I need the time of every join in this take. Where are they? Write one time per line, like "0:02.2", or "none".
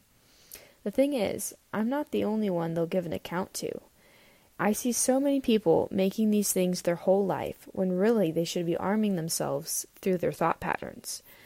0:04.5